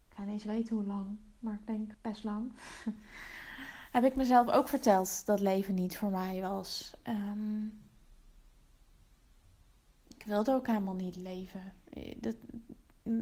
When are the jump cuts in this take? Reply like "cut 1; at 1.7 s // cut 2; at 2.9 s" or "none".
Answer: cut 1; at 1.9 s